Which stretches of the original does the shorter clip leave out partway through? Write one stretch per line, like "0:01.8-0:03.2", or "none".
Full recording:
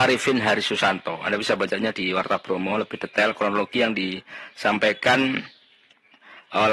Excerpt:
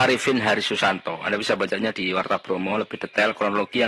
none